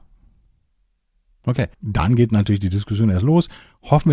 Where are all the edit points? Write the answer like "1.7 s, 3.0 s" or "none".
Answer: 1.7 s